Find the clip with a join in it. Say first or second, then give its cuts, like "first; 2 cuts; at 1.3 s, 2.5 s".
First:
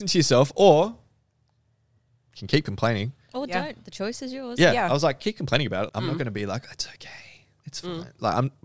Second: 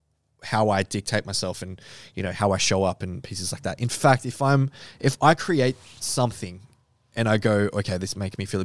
first; 1 cut; at 5.9 s